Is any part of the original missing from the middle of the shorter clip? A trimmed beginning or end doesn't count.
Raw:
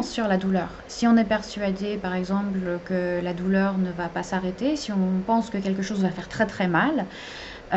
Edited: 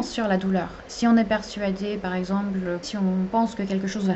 yes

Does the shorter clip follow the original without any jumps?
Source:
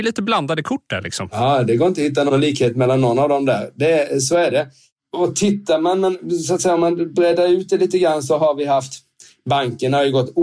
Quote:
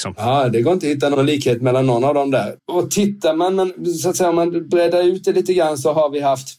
no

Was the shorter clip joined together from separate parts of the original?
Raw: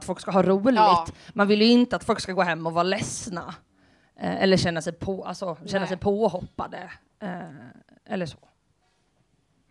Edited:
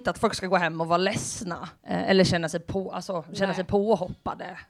yes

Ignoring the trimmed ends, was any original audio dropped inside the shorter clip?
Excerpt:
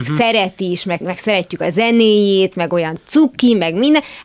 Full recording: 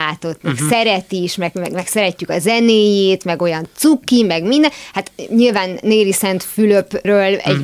yes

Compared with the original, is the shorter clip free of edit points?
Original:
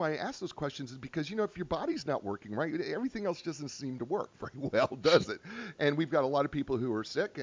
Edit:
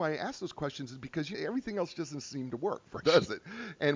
no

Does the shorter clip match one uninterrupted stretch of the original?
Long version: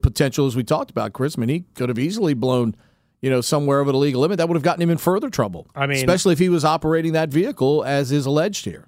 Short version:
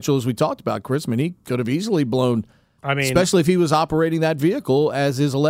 no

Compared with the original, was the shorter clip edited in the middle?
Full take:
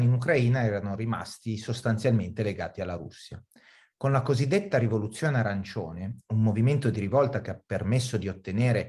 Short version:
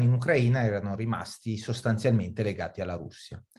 no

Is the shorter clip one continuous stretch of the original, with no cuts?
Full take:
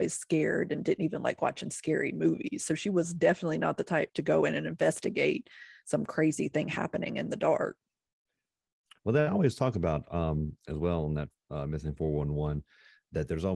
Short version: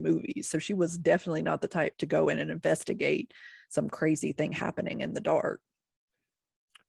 yes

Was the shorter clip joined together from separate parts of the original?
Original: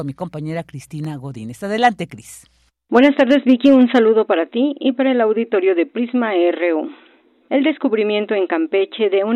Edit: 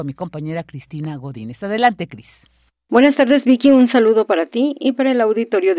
no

